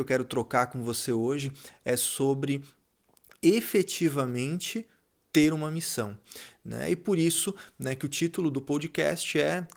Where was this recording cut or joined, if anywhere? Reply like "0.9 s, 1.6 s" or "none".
none